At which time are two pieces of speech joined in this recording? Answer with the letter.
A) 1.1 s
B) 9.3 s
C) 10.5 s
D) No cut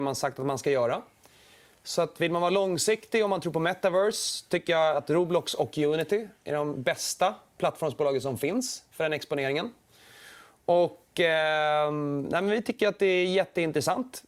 D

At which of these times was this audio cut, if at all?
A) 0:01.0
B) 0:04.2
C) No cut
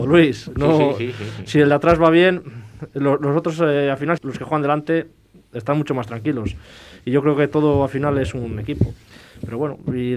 B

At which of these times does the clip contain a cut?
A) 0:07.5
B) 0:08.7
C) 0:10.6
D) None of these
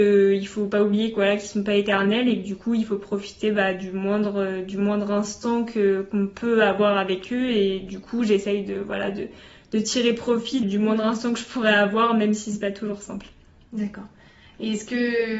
C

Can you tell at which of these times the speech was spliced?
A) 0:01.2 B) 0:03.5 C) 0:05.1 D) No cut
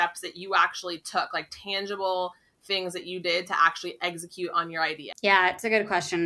C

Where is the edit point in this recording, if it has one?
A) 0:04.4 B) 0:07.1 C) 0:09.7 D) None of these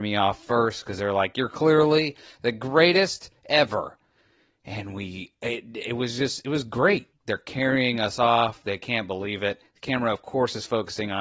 B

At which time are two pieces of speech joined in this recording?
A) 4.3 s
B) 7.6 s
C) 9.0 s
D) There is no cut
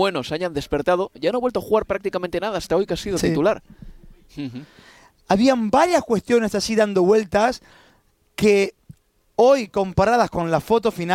A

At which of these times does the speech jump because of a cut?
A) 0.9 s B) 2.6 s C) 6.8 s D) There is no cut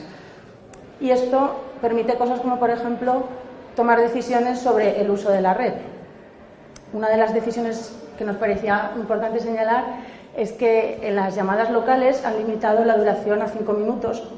A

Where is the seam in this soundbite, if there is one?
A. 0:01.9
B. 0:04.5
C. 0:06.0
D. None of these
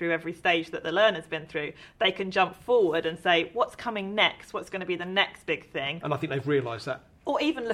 C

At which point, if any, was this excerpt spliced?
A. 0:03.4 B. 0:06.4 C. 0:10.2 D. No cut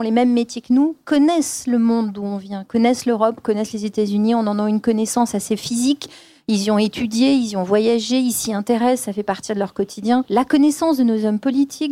D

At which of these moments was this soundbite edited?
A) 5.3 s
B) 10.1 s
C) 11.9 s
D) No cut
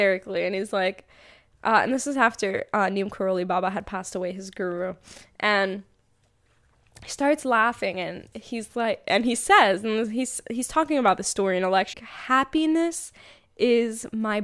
C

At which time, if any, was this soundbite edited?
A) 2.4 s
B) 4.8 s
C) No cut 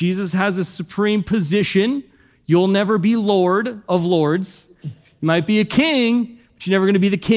B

